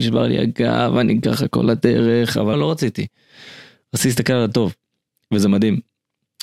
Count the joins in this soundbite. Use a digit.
1